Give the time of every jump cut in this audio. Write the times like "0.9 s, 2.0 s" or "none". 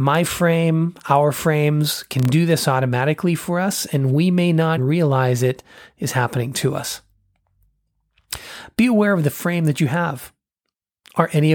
4.8 s